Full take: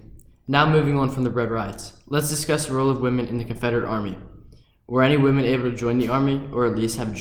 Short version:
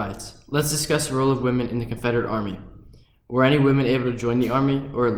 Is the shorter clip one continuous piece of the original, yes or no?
yes